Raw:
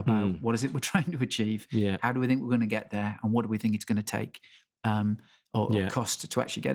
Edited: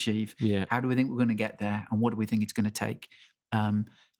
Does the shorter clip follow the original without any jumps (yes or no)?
yes